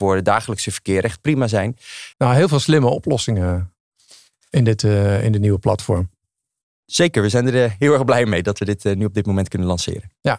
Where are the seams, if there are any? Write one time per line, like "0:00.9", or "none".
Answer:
0:02.1